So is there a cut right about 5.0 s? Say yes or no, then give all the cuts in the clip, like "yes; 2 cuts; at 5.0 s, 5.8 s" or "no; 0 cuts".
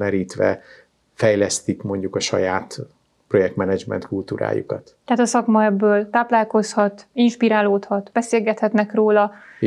no; 0 cuts